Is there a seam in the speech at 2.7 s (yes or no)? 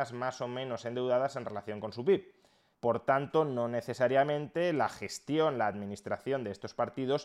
yes